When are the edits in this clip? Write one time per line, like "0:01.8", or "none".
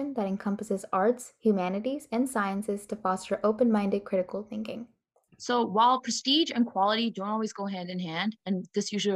0:05.3